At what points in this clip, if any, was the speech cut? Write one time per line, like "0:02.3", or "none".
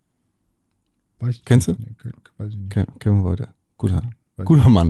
0:01.8